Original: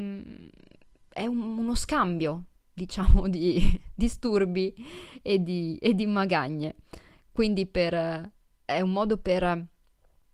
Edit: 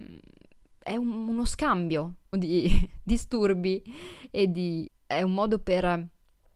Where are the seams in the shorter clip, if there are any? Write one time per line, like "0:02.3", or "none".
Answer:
0:02.3
0:04.9